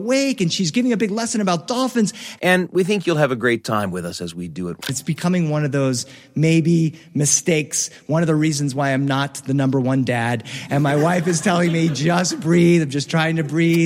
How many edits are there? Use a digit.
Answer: 2